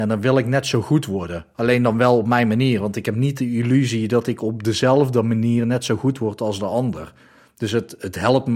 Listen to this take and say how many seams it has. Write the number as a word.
zero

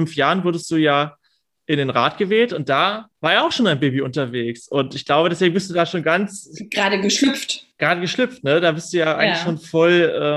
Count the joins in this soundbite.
one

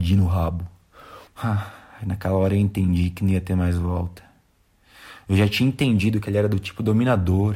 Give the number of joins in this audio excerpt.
one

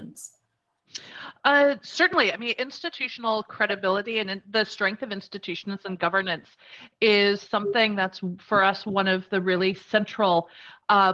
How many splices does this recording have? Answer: zero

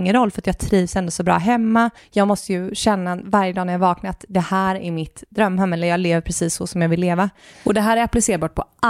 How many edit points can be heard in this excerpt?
two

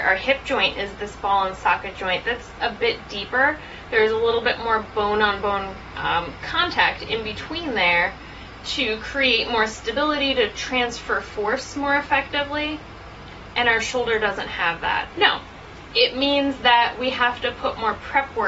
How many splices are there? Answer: one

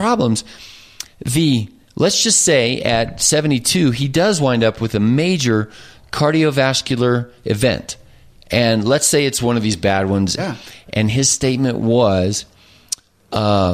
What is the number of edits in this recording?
one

